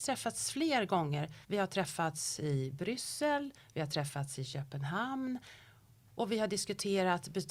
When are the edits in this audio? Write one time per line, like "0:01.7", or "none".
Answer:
0:01.4